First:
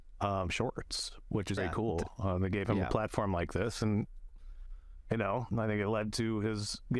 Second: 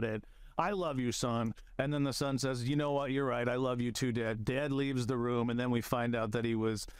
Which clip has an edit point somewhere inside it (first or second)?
first